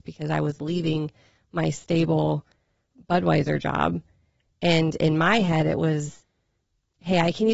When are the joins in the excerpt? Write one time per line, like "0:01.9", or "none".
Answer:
none